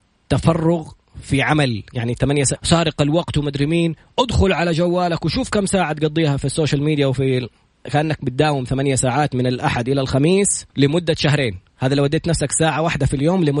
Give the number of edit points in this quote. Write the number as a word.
three